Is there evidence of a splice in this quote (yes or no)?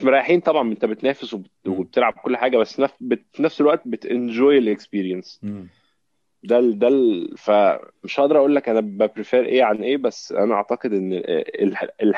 no